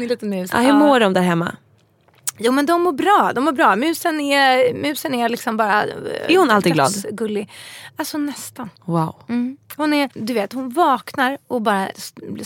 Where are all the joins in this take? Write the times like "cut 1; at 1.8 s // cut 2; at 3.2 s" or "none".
cut 1; at 8.8 s // cut 2; at 10.1 s

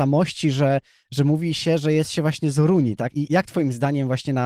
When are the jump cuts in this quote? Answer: cut 1; at 3.1 s

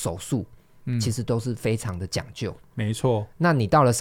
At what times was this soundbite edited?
none

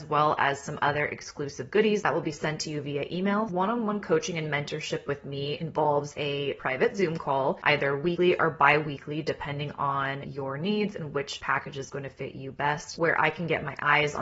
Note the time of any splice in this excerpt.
none

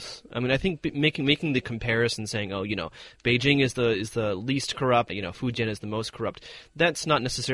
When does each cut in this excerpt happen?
cut 1; at 5.1 s

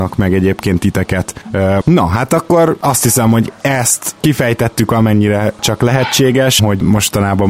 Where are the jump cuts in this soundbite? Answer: cut 1; at 1.8 s // cut 2; at 4.9 s // cut 3; at 6.6 s

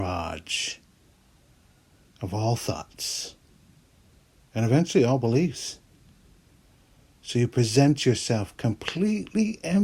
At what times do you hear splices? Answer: none

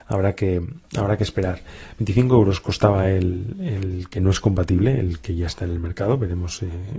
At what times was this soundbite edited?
none

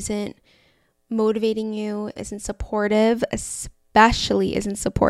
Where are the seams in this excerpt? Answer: cut 1; at 2.2 s

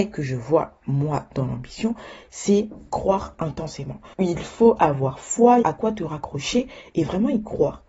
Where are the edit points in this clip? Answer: cut 1; at 4.1 s // cut 2; at 5.6 s

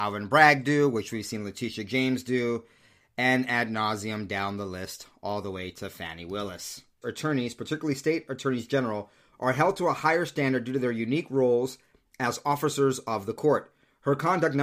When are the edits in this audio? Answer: cut 1; at 7.0 s

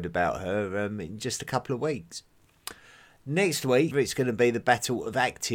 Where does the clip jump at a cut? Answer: cut 1; at 3.9 s

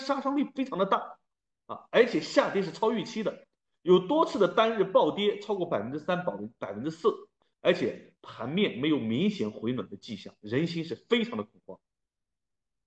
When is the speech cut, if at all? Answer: cut 1; at 7.4 s

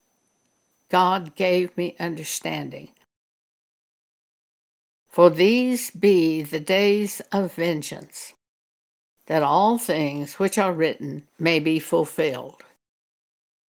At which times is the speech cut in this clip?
cut 1; at 5.0 s // cut 2; at 11.3 s

